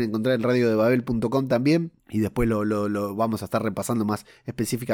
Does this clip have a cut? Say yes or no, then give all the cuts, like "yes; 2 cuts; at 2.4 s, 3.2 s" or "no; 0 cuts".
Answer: yes; 1 cut; at 2.0 s